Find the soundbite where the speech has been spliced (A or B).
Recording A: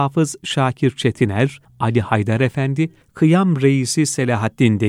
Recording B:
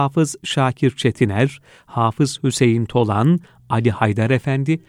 A